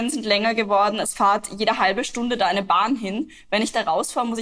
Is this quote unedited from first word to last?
yes; 0 cuts

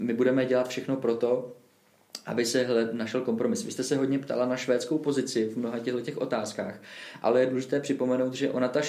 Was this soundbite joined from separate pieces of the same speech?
no; 0 cuts

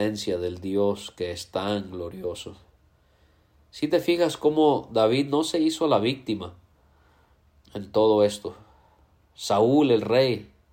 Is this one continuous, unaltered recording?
yes; 0 cuts

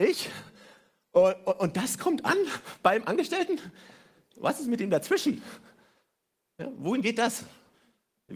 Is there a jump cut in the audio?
no; 0 cuts

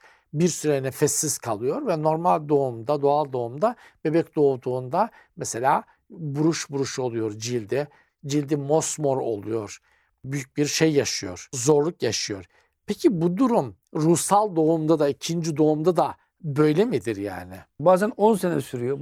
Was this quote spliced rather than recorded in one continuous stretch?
yes; 2 cuts; at 13.8 s, 17.8 s

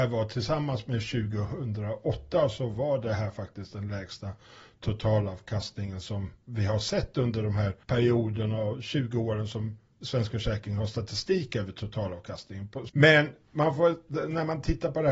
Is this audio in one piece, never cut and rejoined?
no; 2 cuts; at 7.8 s, 12.9 s

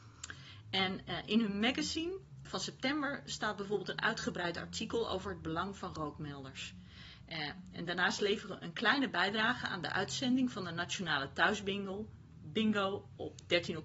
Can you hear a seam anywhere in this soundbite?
yes; 1 cut; at 2.5 s

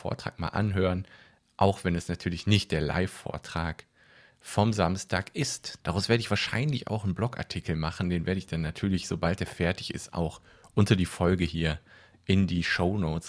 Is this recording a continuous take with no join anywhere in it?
no; 1 cut; at 5.8 s

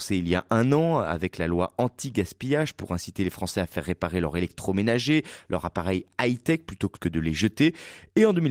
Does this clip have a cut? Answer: yes; 1 cut; at 7.0 s

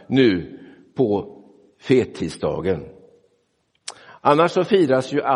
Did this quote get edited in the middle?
no; 0 cuts

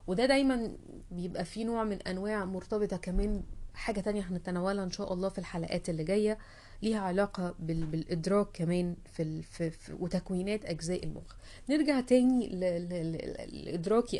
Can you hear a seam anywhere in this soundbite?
no; 0 cuts

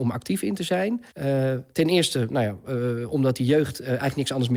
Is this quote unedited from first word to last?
no; 1 cut; at 1.1 s

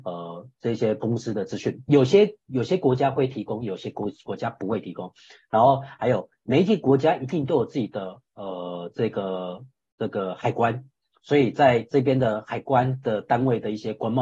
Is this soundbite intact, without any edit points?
yes; 0 cuts

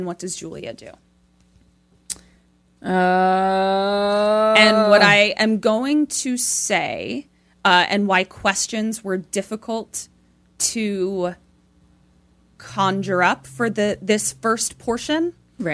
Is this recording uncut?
yes; 0 cuts

